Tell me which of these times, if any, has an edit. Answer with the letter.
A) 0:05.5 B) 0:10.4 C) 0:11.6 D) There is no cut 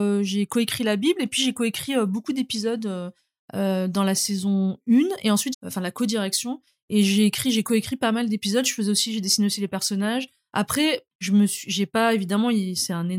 A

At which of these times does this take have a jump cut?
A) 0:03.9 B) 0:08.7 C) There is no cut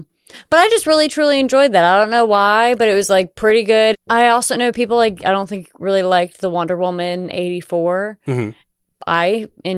A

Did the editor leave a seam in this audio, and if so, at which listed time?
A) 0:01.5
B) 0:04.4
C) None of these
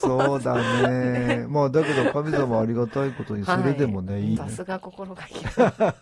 B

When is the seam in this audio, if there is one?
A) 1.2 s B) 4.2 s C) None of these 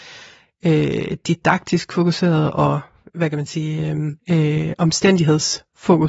B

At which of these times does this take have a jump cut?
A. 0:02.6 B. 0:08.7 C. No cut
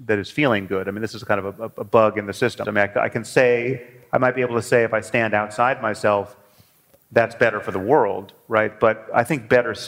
A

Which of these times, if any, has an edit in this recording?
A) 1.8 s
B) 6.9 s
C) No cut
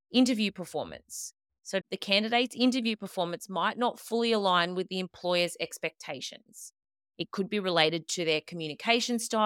A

